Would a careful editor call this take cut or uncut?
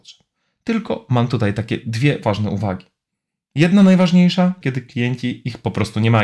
cut